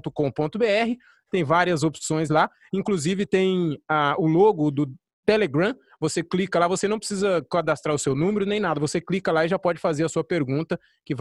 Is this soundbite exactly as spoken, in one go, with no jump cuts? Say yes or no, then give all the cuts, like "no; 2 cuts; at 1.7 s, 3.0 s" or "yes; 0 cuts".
yes; 0 cuts